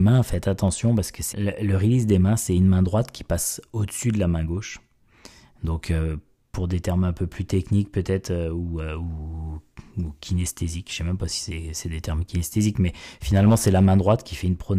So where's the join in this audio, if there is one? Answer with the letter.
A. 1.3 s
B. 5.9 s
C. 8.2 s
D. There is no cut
A